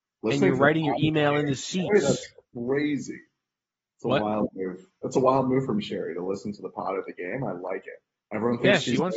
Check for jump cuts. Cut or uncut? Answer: uncut